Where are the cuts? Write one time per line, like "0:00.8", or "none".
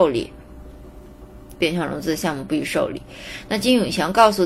0:01.5

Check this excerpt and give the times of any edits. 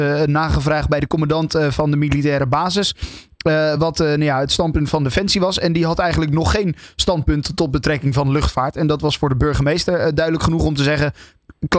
none

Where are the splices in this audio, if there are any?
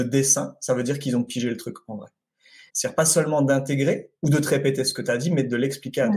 0:02.7
0:04.2

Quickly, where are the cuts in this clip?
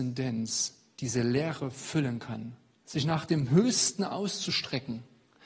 0:02.9

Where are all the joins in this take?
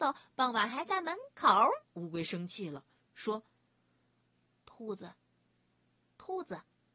0:01.9

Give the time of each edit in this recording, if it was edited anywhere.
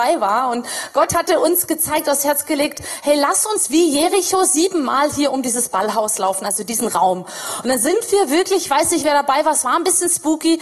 none

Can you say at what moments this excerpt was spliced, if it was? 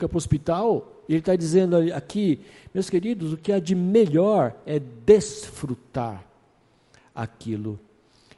0:01.1

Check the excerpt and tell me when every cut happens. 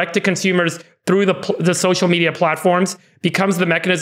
none

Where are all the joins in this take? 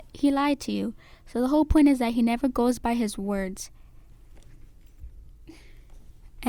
none

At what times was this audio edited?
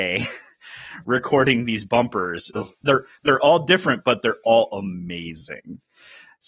0:02.5

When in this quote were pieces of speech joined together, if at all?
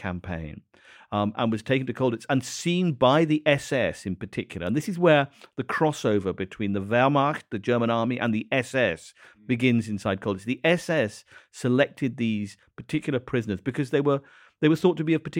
none

